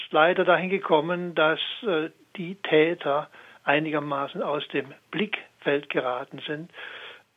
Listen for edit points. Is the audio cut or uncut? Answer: uncut